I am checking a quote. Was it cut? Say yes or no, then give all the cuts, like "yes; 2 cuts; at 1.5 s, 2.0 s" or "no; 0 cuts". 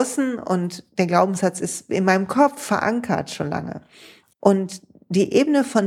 yes; 1 cut; at 4.3 s